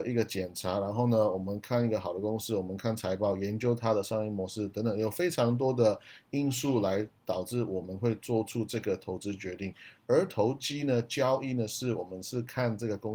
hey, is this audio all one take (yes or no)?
yes